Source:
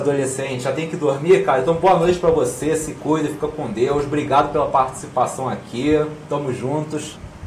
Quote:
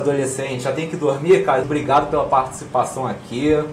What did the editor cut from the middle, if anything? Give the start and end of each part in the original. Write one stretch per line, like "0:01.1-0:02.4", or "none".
0:01.6-0:04.1